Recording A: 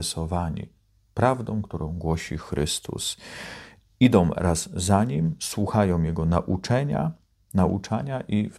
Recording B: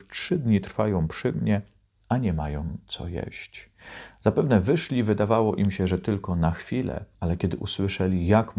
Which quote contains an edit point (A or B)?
B